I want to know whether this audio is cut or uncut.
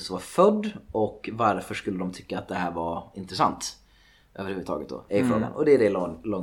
uncut